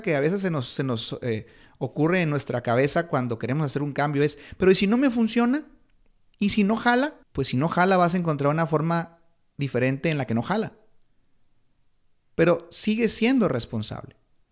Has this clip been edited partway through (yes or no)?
yes